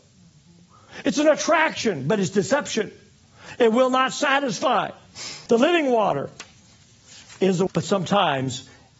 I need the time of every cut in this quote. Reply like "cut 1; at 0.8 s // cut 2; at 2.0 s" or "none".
cut 1; at 5.5 s // cut 2; at 7.7 s